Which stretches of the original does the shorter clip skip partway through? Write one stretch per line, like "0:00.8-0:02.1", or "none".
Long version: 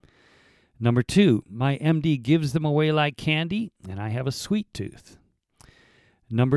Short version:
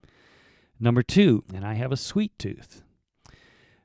0:01.4-0:03.8